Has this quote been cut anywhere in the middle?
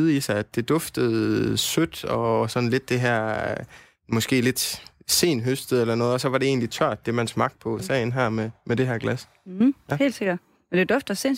yes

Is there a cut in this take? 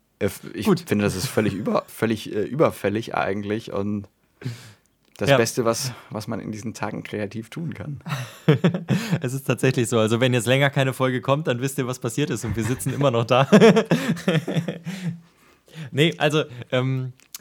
yes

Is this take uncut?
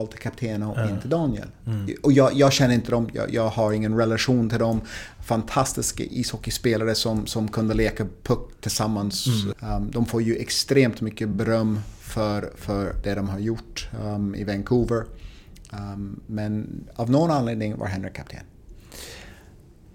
no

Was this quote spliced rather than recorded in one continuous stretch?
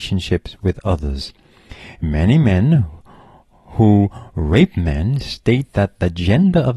no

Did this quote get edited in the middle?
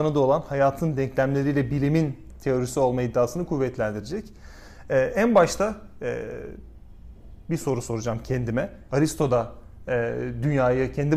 yes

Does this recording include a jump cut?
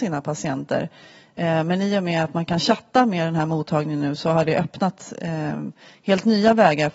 no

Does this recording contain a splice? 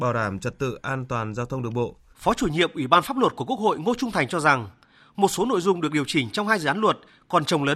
yes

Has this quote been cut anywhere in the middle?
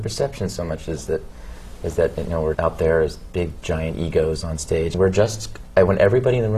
yes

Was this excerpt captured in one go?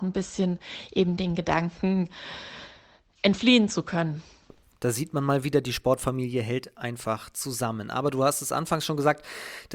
yes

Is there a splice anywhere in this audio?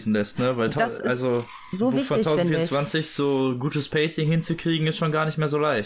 no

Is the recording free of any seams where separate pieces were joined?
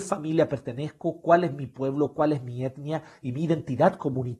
yes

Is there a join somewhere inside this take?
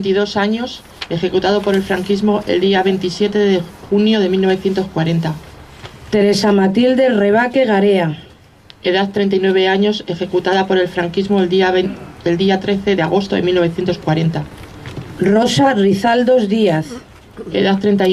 no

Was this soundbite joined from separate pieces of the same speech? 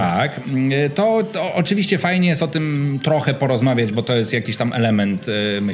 no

